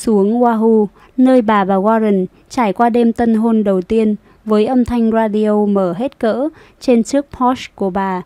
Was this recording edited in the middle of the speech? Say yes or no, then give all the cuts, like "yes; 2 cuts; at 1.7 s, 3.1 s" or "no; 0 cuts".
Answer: no; 0 cuts